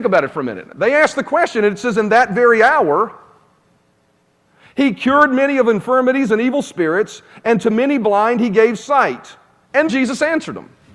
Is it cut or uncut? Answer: cut